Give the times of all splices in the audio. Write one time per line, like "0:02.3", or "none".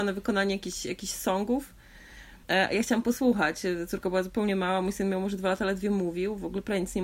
0:02.4